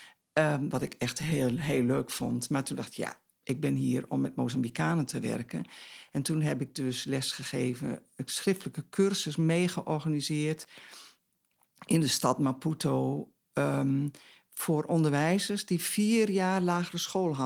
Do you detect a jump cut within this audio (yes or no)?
no